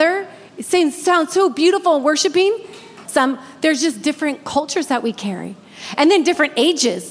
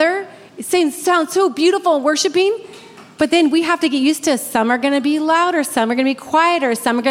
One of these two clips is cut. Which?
first; 1 cut; at 3.1 s

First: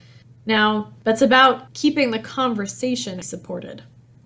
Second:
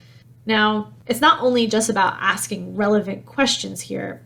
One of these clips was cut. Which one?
first; 2 cuts; at 1.0 s, 3.2 s

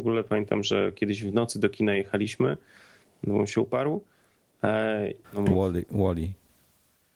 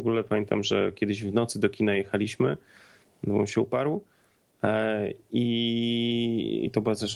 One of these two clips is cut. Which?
first; 1 cut; at 5.2 s

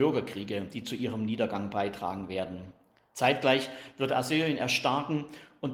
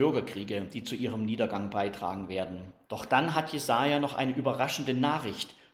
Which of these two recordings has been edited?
second; 1 cut; at 2.8 s

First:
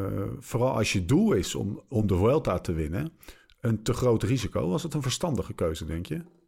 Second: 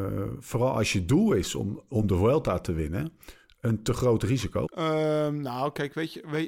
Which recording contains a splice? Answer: second; 1 cut; at 4.7 s

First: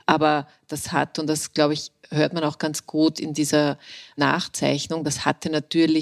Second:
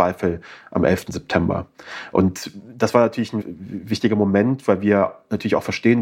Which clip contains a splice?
second; 1 cut; at 3.4 s

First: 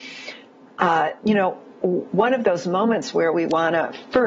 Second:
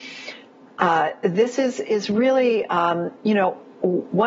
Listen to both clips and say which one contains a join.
first; 1 cut; at 1.2 s

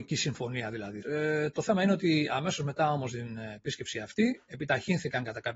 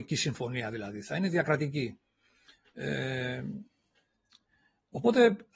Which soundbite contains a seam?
first; 1 cut; at 1.0 s

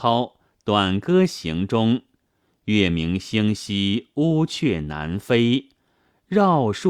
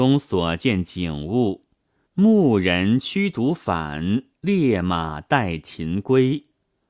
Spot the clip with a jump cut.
second; 1 cut; at 2.1 s

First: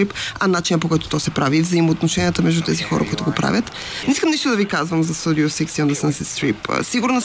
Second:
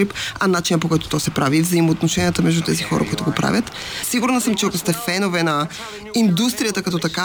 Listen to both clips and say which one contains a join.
second; 1 cut; at 4.0 s

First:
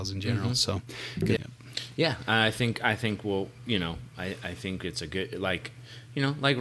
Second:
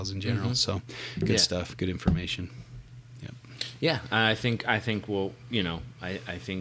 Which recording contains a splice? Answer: first; 1 cut; at 1.4 s

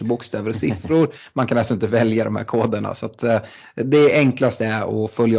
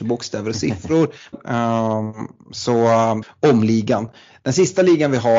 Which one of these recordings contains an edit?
second; 2 cuts; at 1.3 s, 3.2 s

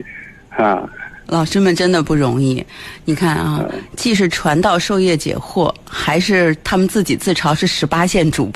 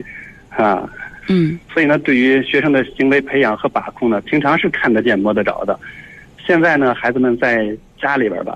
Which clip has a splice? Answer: second; 1 cut; at 1.2 s

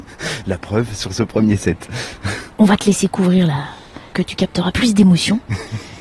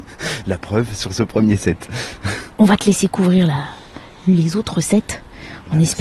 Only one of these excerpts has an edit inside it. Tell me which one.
first; 1 cut; at 4.1 s

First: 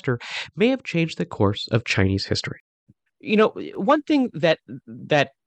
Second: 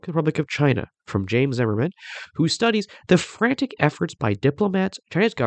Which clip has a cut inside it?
first; 1 cut; at 3.1 s

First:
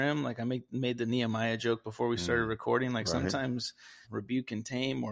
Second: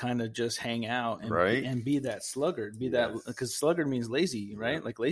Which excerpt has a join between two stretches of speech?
first; 1 cut; at 4.0 s

